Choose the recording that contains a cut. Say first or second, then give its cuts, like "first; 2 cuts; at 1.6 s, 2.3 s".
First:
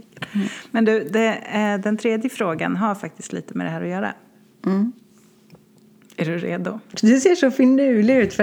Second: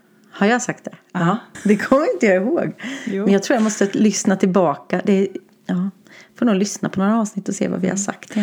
second; 1 cut; at 1.5 s